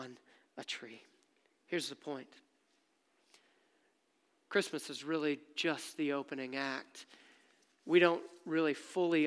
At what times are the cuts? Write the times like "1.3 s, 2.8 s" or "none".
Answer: none